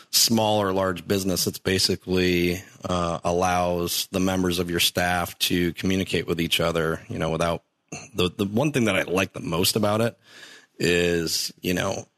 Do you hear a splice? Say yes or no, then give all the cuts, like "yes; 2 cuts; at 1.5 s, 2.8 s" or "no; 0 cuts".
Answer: no; 0 cuts